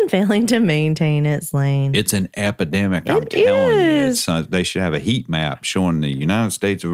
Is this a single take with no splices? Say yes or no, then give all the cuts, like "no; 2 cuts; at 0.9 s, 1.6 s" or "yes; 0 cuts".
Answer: yes; 0 cuts